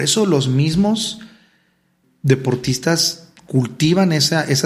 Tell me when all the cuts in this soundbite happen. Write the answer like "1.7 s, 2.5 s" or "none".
2.0 s